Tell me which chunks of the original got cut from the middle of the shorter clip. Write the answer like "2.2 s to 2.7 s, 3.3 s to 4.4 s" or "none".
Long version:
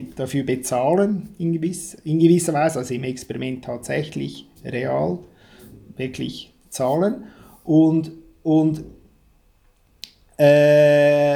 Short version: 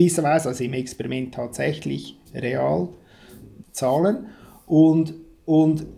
5.9 s to 6.6 s